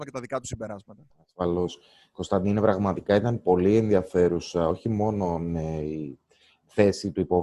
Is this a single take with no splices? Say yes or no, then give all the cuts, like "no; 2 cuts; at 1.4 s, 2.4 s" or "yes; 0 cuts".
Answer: yes; 0 cuts